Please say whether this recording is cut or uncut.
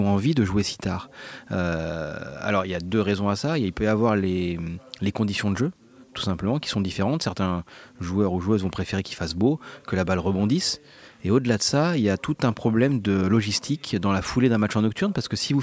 uncut